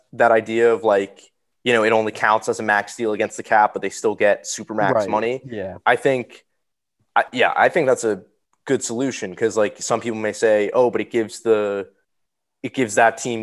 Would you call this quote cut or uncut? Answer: uncut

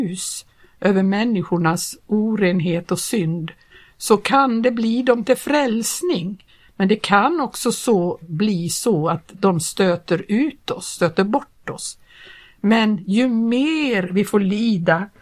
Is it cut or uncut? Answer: uncut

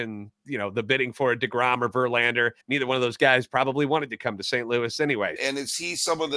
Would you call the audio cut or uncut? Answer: cut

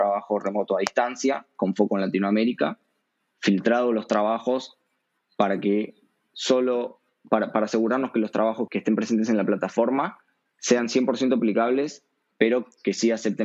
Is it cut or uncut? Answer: cut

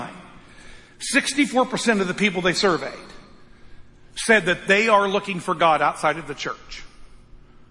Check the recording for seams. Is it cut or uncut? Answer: uncut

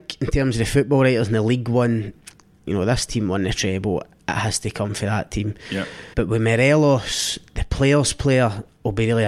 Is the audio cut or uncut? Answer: cut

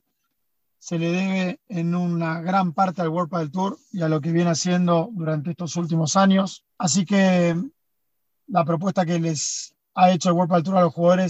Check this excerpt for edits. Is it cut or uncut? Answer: cut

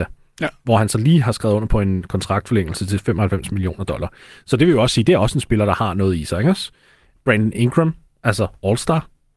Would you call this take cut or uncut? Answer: uncut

